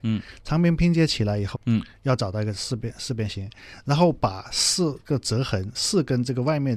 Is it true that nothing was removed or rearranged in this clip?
no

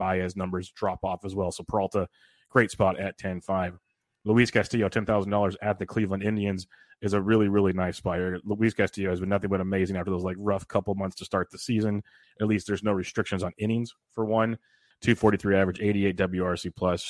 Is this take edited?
yes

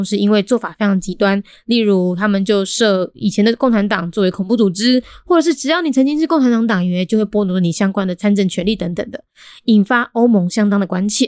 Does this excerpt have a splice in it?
no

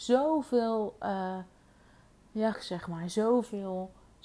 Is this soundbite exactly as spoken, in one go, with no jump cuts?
no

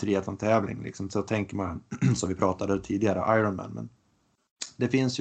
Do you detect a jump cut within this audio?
no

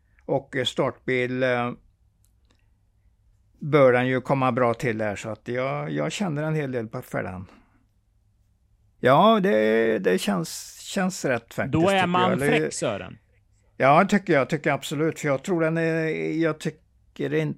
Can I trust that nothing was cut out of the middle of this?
no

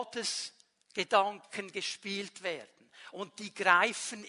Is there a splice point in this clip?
no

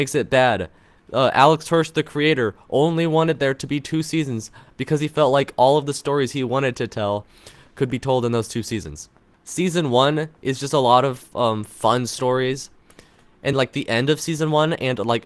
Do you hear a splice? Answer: yes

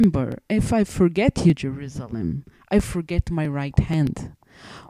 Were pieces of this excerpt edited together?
no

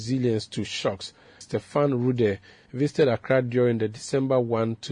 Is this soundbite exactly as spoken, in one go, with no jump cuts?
no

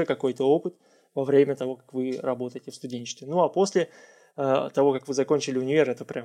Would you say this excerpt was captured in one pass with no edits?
yes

